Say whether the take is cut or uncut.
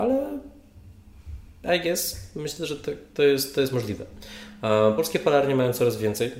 uncut